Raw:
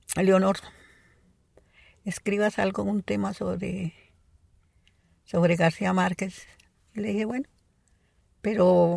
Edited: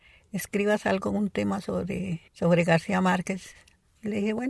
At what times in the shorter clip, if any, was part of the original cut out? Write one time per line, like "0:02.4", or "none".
0:02.3

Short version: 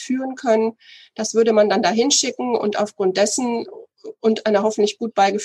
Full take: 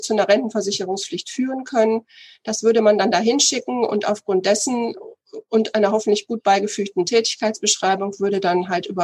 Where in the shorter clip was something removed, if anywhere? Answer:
none

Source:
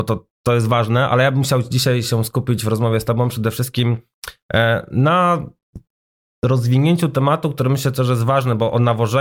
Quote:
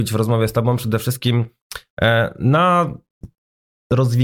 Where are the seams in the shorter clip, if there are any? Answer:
none

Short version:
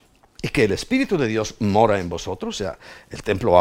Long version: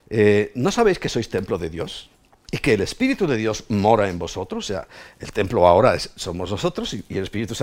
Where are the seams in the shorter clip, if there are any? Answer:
none

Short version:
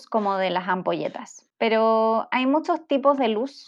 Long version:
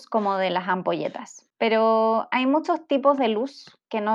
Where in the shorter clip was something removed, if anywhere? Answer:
none

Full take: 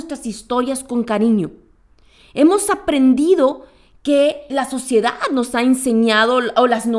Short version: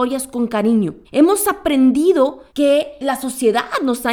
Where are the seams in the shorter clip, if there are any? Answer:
0:01.0
0:02.5

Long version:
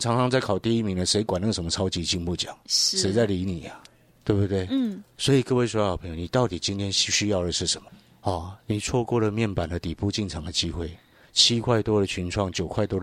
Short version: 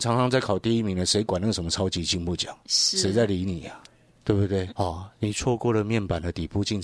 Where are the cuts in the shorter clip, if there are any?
0:04.7

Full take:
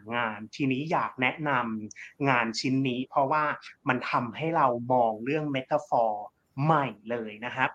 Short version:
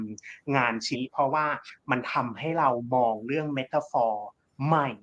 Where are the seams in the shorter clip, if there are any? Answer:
0:00.9

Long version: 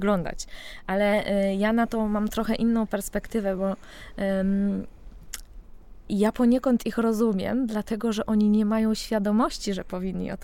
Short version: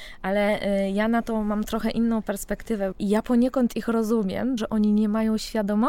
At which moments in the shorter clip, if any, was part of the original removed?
0:02.9
0:04.6

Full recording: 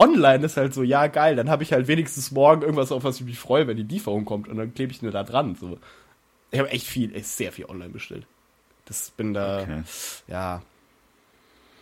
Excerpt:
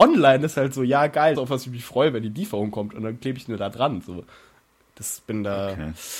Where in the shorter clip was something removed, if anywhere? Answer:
0:01.3
0:04.8

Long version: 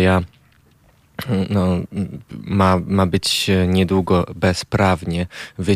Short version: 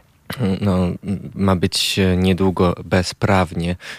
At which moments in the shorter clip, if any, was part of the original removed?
0:01.3

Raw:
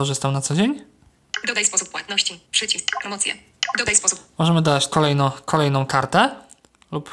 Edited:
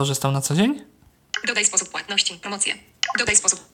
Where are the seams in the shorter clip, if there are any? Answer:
0:02.4

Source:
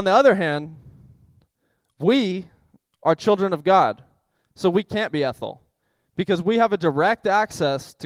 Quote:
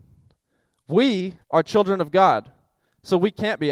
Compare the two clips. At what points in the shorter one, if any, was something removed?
0:01.4

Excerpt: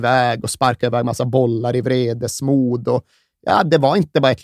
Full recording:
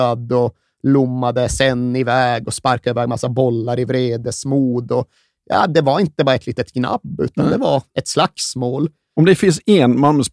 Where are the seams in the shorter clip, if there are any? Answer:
none

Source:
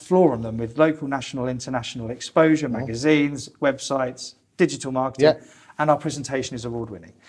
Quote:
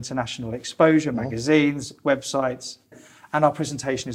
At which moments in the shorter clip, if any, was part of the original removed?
0:02.9

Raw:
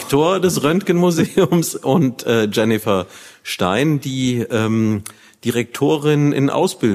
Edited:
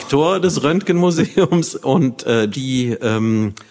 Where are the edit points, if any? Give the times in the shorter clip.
0:02.5

